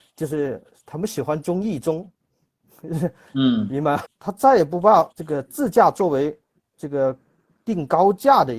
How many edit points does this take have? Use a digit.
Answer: 2